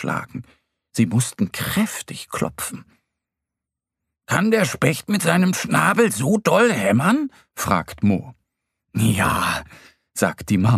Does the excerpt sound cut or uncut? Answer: uncut